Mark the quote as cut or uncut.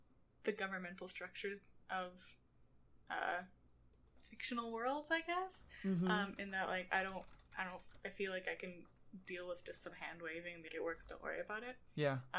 cut